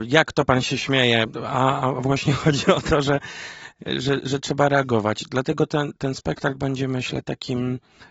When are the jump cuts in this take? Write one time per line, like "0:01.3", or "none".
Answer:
none